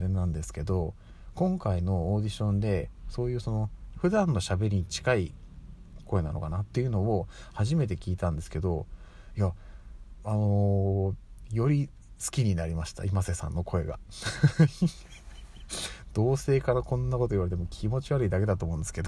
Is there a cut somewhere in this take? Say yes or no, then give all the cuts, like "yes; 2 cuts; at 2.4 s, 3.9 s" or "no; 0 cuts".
yes; 1 cut; at 3.9 s